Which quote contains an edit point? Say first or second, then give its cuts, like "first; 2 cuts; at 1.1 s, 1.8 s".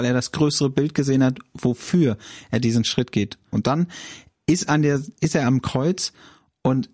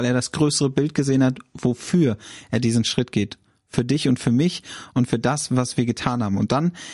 first; 1 cut; at 3.5 s